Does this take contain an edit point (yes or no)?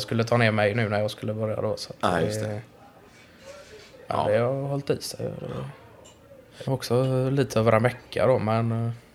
yes